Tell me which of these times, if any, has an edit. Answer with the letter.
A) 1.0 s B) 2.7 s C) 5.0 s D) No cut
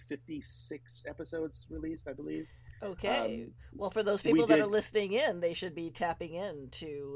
D